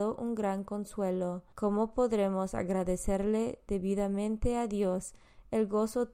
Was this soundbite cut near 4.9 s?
no; 1 cut; at 1.5 s

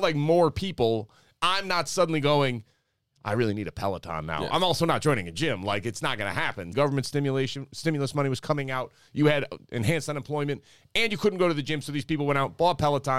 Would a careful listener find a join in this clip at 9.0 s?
no; 1 cut; at 6.7 s

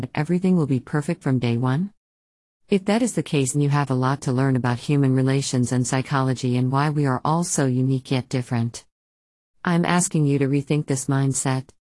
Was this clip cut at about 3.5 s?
yes; 1 cut; at 3.5 s

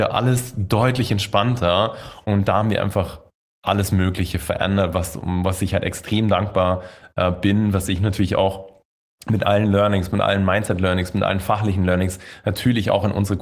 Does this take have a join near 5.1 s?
no; 1 cut; at 2.2 s

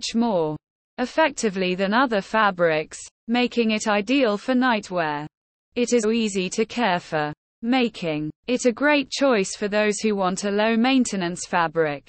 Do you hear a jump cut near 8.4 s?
yes; 2 cuts; at 6.0 s, 8.4 s

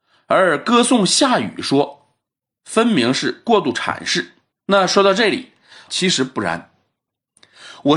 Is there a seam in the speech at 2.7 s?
no; 2 cuts; at 4.5 s, 5.9 s

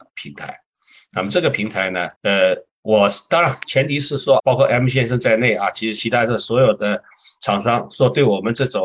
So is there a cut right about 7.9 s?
no; 2 cuts; at 2.2 s, 4.4 s

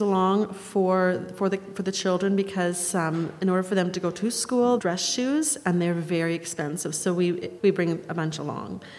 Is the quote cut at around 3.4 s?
no; 2 cuts; at 4.8 s, 7.6 s

